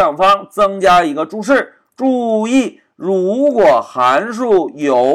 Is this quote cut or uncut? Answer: uncut